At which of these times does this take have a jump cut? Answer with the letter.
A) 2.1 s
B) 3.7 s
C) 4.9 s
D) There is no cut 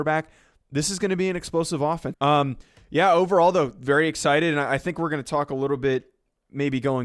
A